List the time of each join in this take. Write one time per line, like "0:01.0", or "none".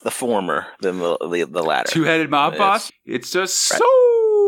0:02.9